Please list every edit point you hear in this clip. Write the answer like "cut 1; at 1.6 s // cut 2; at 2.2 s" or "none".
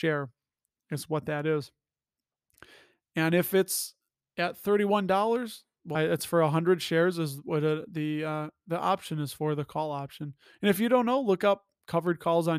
cut 1; at 5.9 s